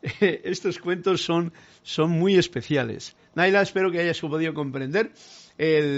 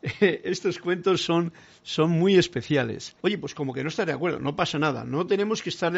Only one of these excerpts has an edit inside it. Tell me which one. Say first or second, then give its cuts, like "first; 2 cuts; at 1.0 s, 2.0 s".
second; 1 cut; at 3.2 s